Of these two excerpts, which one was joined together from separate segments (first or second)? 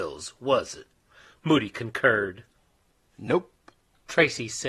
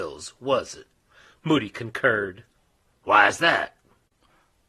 second